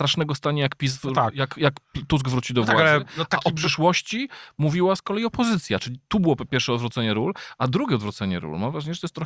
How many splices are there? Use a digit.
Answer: 0